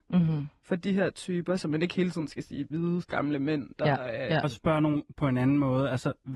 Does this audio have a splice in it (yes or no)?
yes